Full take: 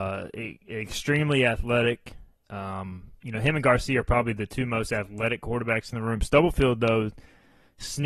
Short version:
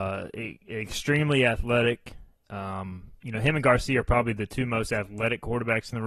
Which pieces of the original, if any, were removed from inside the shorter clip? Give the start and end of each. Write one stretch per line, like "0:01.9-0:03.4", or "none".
none